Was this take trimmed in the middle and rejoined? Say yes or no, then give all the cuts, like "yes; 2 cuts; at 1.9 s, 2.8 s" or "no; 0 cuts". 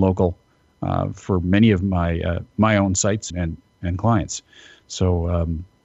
yes; 1 cut; at 3.3 s